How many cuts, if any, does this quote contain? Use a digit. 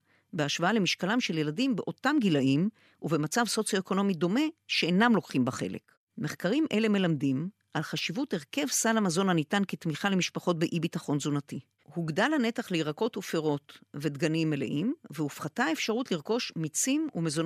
1